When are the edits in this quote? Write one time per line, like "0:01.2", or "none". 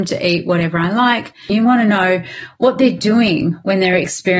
0:01.5